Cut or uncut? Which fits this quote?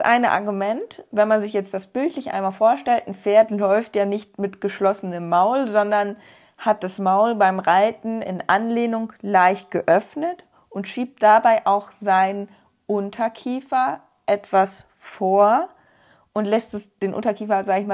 uncut